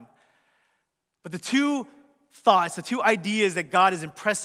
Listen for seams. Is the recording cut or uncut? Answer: uncut